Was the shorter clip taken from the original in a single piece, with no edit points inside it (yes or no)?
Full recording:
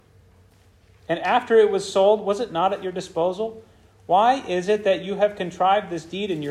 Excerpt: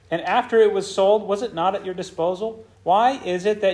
no